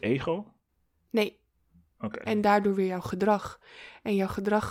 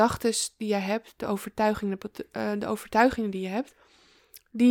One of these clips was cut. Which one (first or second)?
first